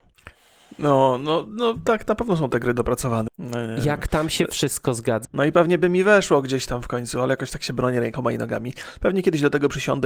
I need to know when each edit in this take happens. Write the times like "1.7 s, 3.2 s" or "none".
3.3 s, 5.2 s